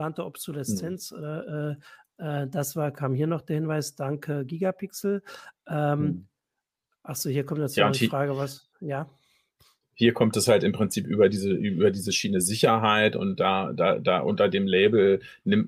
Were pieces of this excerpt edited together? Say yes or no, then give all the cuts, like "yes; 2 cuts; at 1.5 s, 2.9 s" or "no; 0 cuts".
no; 0 cuts